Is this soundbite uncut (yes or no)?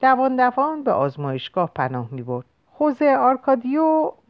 no